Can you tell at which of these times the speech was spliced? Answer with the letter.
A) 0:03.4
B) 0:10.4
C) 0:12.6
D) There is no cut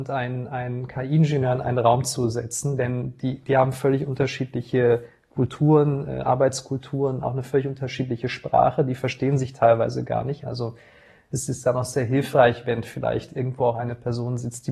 B